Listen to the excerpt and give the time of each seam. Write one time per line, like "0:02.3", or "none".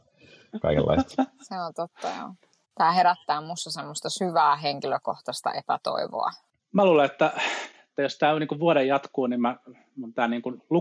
0:02.6
0:06.6